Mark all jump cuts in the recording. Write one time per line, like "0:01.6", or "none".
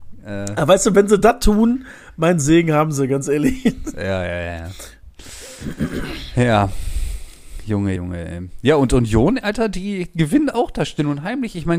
0:08.0